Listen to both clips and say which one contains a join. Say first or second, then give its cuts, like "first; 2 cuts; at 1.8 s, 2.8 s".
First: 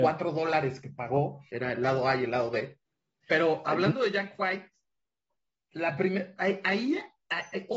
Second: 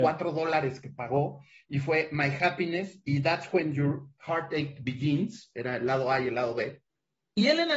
first; 2 cuts; at 1.5 s, 3.2 s